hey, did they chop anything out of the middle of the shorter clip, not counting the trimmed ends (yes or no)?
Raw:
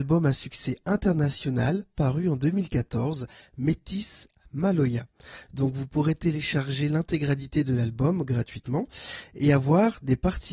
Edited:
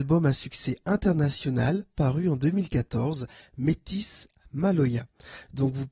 no